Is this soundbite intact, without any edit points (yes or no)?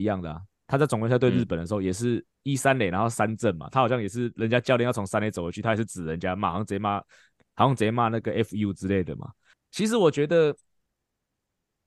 yes